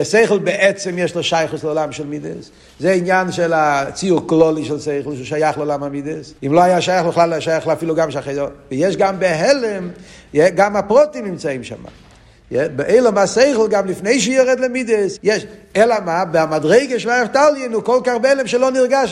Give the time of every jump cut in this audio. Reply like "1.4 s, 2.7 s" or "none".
6.4 s, 15.2 s